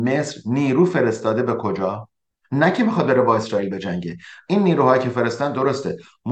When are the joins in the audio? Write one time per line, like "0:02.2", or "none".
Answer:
none